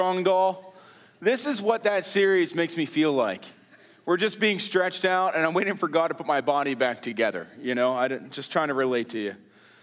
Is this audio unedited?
yes; 0 cuts

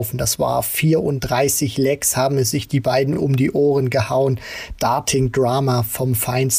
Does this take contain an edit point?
no; 0 cuts

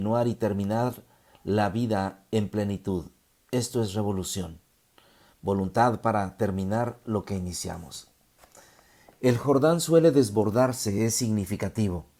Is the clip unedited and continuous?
yes; 0 cuts

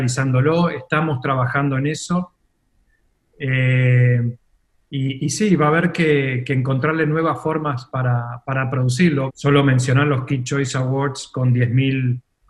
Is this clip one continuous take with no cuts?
no; 1 cut; at 9.3 s

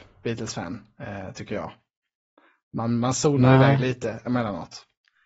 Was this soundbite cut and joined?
no; 0 cuts

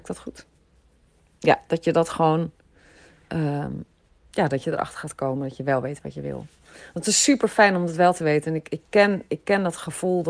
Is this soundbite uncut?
yes; 0 cuts

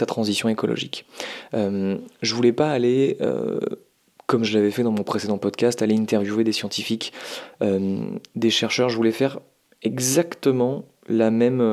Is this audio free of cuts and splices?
yes; 0 cuts

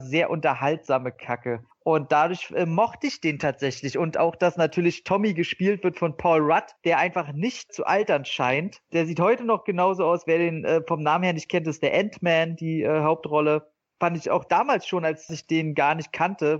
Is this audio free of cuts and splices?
yes; 0 cuts

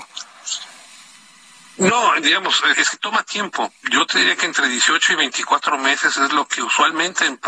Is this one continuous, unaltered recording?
no; 1 cut; at 2.7 s

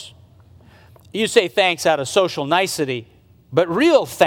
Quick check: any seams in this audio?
no; 0 cuts

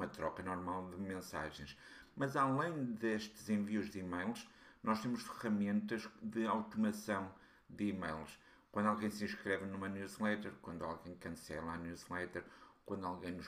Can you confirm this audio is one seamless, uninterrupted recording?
yes; 0 cuts

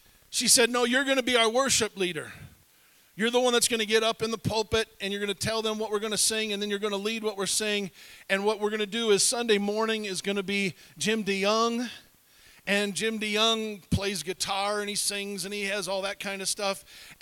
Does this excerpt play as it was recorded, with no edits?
yes; 0 cuts

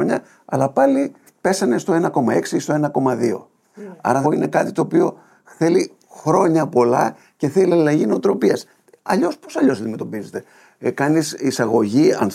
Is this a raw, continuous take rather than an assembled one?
no; 1 cut; at 4.2 s

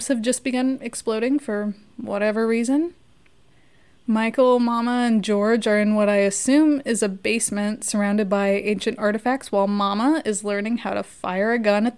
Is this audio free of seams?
yes; 0 cuts

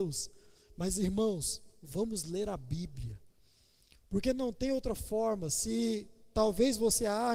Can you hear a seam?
no; 0 cuts

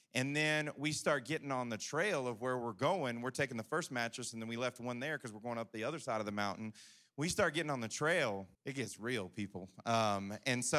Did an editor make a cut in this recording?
yes; 1 cut; at 8.5 s

